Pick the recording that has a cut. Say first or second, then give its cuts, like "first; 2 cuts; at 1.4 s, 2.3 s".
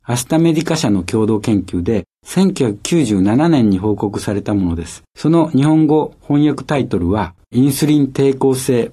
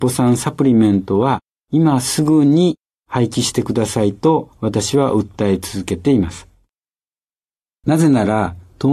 first; 2 cuts; at 5.1 s, 7.4 s